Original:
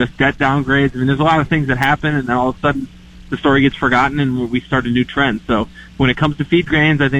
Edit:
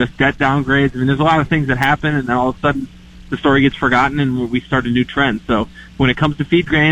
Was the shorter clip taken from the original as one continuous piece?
yes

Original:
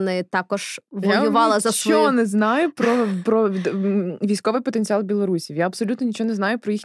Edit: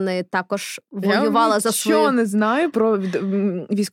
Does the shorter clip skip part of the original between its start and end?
yes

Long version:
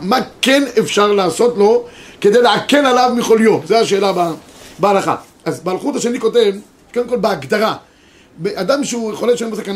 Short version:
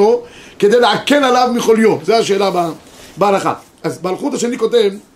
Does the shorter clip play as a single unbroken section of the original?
yes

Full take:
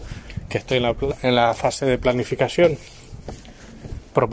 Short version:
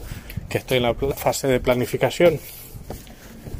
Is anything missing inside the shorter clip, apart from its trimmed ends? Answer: yes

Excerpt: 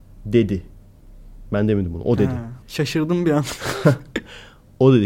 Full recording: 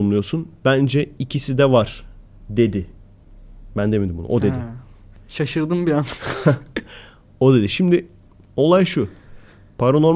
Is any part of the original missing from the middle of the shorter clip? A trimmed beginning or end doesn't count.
yes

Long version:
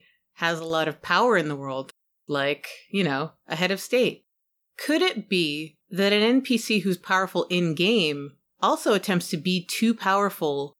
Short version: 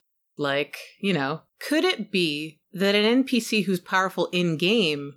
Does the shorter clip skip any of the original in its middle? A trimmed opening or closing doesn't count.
yes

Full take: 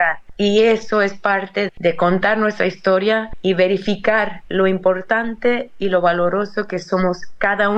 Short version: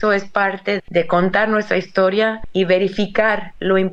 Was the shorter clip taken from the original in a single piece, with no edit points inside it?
yes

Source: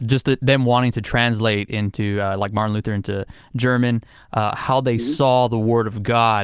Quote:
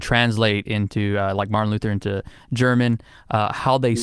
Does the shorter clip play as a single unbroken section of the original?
yes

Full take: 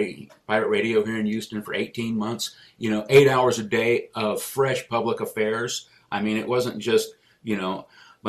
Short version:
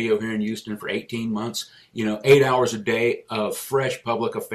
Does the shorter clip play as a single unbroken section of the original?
yes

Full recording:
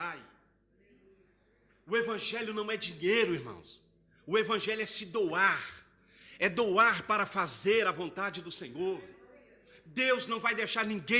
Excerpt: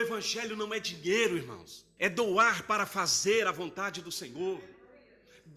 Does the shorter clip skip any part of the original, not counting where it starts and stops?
yes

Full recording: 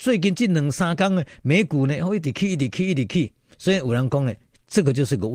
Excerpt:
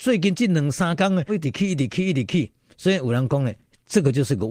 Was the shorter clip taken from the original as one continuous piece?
no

